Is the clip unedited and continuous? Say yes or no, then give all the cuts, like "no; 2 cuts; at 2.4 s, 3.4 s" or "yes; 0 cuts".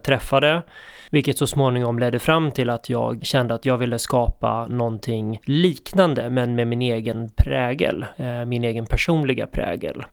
no; 1 cut; at 3.2 s